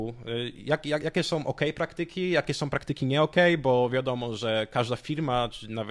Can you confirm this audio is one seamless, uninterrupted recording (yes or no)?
yes